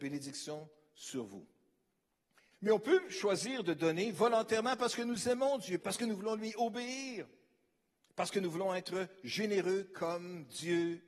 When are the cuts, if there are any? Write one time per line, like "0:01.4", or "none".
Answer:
0:02.5
0:05.8